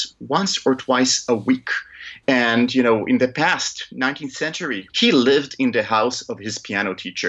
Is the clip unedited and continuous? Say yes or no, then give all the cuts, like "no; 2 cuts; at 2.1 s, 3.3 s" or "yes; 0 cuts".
no; 2 cuts; at 2.2 s, 4.9 s